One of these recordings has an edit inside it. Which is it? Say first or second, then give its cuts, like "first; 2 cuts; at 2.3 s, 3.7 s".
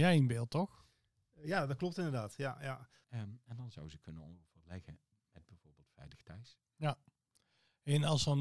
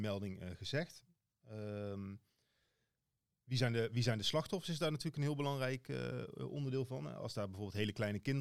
first; 1 cut; at 3.0 s